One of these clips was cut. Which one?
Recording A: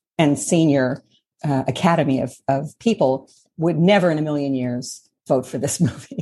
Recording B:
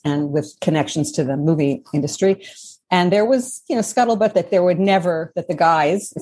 A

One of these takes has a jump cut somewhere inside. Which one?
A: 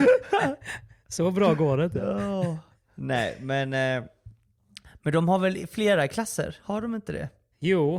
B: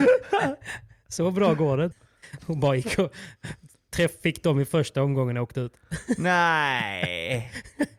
B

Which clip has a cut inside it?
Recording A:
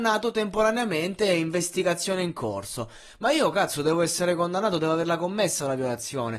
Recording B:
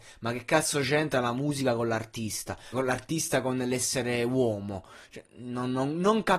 B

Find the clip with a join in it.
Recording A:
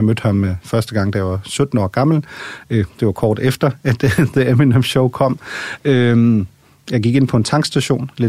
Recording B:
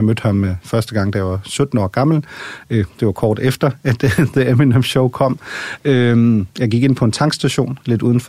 B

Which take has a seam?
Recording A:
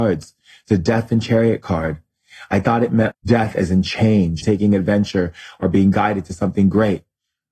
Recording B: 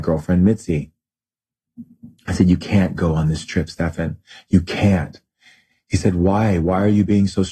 A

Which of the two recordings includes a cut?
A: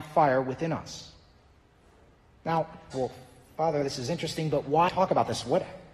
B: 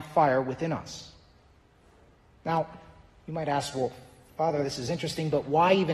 A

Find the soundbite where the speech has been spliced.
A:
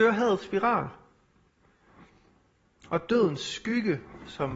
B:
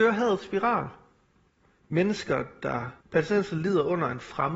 B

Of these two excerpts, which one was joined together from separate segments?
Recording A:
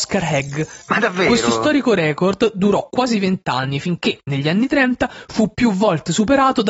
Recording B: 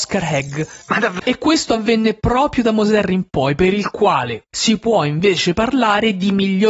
B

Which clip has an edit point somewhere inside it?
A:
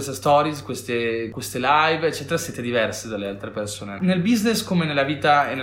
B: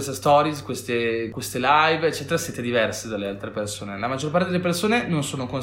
A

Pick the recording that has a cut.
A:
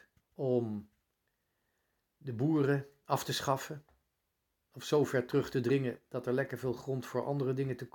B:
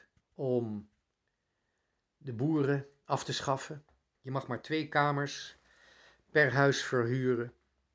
B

